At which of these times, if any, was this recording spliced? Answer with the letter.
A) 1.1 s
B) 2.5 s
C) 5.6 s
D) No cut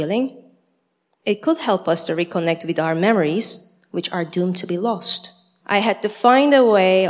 C